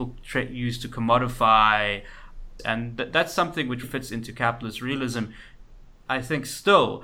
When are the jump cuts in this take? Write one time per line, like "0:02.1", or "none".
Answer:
0:02.6
0:03.8